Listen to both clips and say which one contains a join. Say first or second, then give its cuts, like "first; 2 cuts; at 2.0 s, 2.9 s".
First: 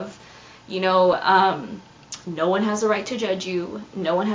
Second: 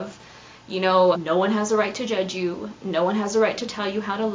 second; 1 cut; at 1.1 s